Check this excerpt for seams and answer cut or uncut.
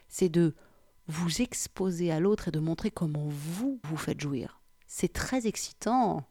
cut